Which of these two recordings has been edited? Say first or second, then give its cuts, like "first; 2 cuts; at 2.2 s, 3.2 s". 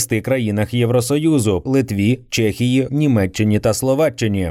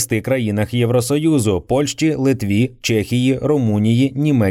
first; 2 cuts; at 1.7 s, 2.9 s